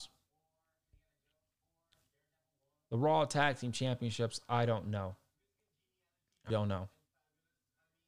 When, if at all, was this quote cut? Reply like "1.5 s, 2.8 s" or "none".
6.5 s